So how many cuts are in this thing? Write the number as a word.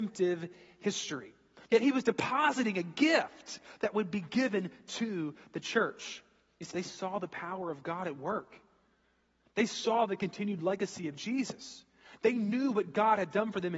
two